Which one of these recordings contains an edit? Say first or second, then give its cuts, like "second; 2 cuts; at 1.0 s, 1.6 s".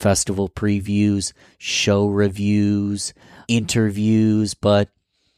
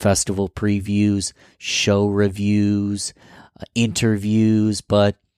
first; 1 cut; at 3.4 s